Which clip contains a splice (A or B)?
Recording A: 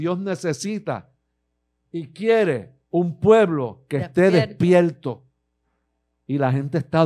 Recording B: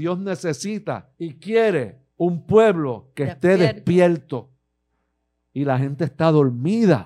B